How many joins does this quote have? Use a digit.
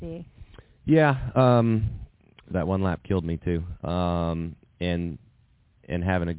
2